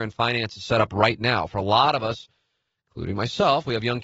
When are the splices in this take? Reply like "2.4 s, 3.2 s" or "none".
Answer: none